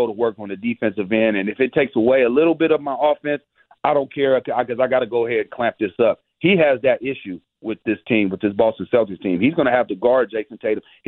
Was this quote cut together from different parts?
no; 0 cuts

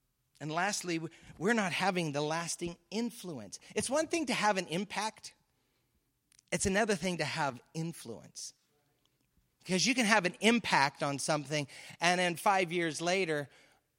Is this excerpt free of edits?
yes; 0 cuts

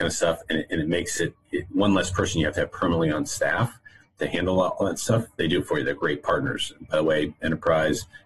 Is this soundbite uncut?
yes; 0 cuts

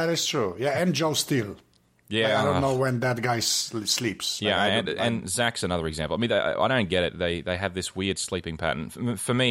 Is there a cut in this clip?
no; 0 cuts

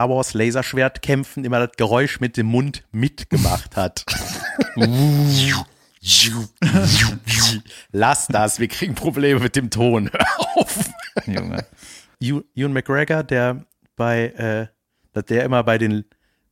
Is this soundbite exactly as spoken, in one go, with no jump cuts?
no; 2 cuts; at 12.1 s, 15.0 s

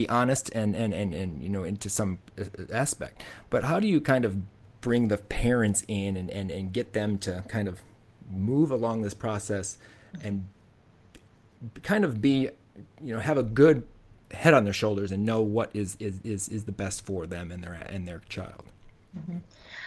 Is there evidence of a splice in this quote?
no; 0 cuts

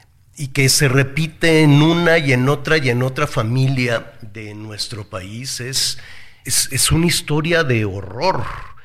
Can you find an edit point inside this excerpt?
yes; 1 cut; at 6.4 s

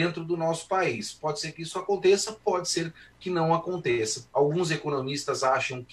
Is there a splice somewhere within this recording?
yes; 1 cut; at 4.3 s

